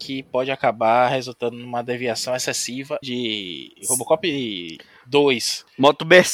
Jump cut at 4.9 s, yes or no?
no